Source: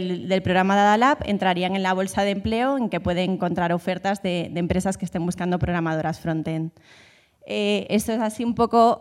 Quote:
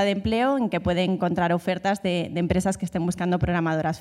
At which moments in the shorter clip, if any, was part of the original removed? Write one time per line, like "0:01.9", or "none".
none